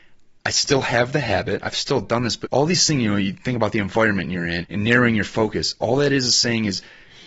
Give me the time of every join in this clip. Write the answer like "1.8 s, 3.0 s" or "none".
2.4 s, 4.6 s